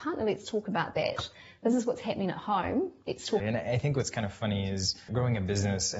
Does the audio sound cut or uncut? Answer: cut